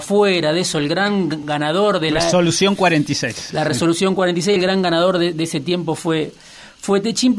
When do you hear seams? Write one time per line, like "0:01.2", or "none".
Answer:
none